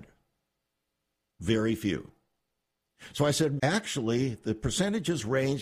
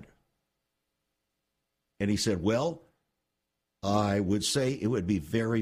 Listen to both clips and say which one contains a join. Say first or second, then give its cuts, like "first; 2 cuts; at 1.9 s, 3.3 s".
first; 2 cuts; at 1.3 s, 3.6 s